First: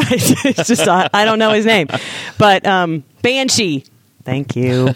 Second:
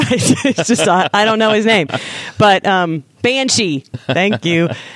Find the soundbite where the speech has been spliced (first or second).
second